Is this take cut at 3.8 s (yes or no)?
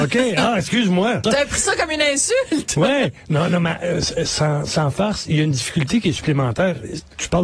no